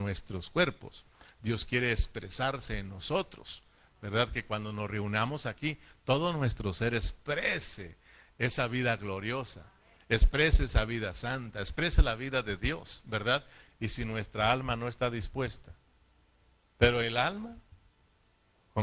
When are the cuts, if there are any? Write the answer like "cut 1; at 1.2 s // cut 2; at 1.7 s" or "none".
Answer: cut 1; at 13.7 s // cut 2; at 16.6 s